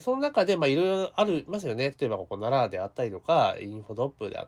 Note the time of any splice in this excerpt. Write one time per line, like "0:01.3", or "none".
none